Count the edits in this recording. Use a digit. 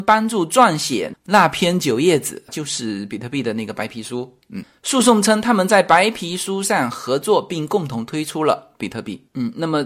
1